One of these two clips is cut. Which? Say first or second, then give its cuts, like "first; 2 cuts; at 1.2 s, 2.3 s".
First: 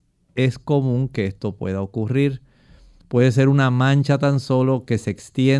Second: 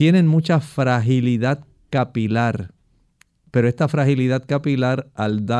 first; 1 cut; at 2.9 s